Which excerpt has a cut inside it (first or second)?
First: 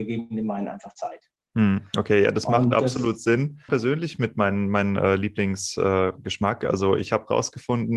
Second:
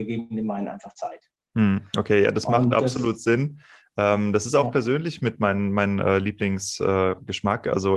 first